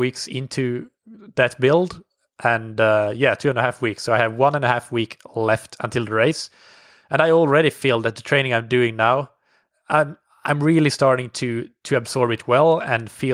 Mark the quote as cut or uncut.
uncut